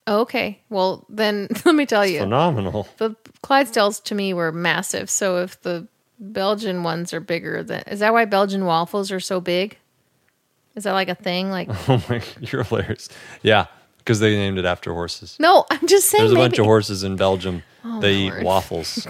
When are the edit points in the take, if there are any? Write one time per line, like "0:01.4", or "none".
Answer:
none